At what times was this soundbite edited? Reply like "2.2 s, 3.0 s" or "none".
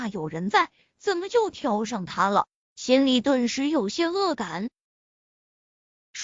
none